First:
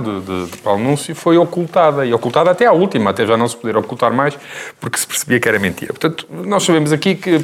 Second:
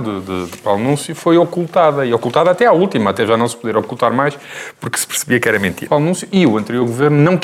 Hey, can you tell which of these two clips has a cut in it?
second; 1 cut; at 5.9 s

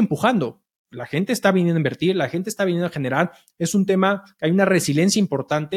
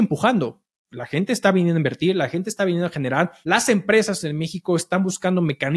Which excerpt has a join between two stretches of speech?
second; 1 cut; at 3.4 s

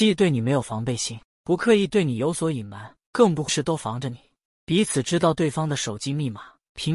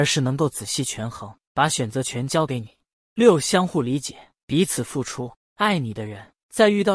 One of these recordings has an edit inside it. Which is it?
first; 1 cut; at 3.5 s

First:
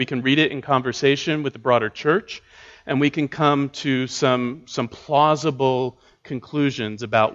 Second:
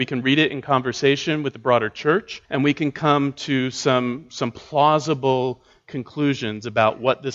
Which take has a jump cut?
second; 1 cut; at 2.5 s

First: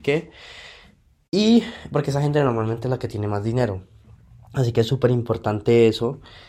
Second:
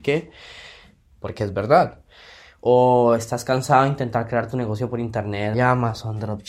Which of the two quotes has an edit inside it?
second; 2 cuts; at 1.1 s, 5.5 s

